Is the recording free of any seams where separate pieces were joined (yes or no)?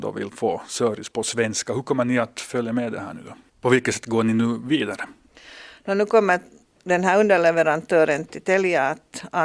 no